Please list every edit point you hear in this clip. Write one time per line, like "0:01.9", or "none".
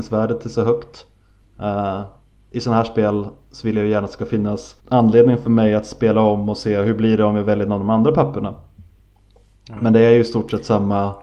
0:01.4
0:04.8